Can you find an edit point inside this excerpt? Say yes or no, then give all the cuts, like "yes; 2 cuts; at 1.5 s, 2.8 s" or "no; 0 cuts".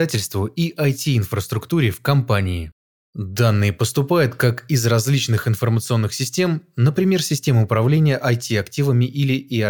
no; 0 cuts